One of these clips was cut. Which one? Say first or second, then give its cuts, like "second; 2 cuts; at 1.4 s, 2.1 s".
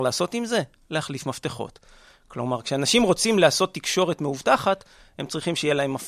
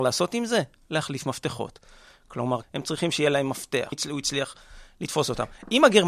second; 2 cuts; at 2.6 s, 3.9 s